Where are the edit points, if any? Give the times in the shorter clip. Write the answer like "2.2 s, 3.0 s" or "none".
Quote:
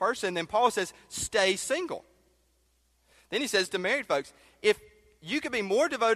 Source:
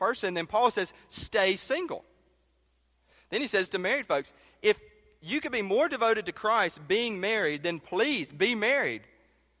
none